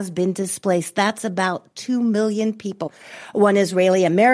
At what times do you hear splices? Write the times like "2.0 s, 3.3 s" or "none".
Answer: none

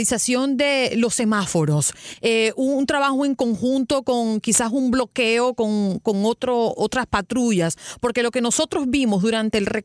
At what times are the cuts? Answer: none

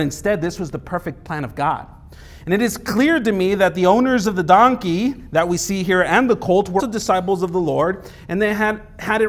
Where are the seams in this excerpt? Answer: 2.4 s, 6.8 s

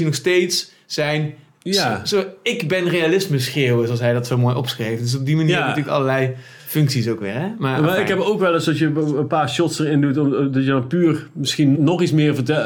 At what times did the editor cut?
11.7 s

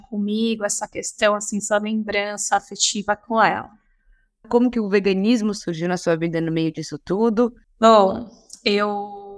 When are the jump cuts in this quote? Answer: 4.4 s, 7.6 s

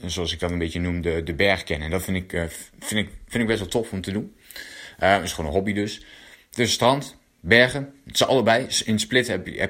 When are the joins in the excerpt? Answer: none

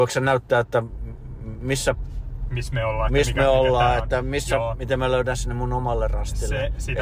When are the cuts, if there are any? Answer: none

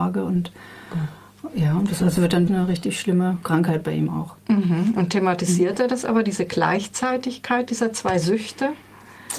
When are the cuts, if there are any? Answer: 2.5 s

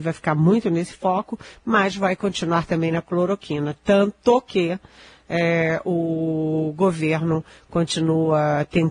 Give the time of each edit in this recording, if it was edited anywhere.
none

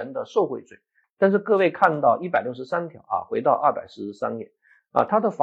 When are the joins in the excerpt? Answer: 1.0 s

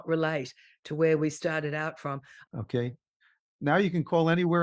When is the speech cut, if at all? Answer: 2.5 s

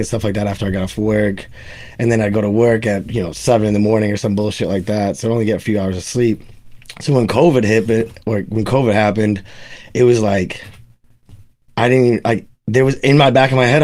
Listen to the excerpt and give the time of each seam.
none

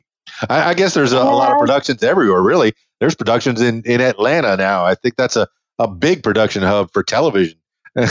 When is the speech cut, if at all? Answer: none

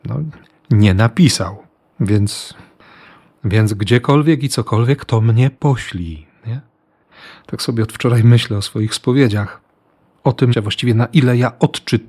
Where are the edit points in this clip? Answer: 1.8 s, 10.5 s

